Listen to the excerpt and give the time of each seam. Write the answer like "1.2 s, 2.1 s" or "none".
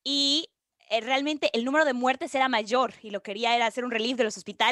none

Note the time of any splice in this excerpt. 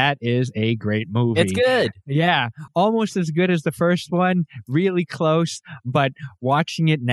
none

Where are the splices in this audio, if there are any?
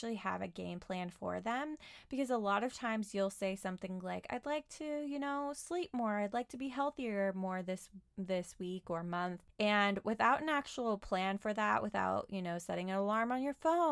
none

